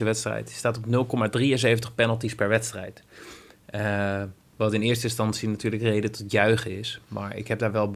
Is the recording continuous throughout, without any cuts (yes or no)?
yes